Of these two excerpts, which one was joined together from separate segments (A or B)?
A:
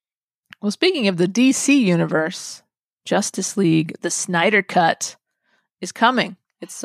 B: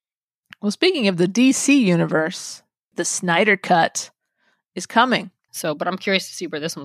B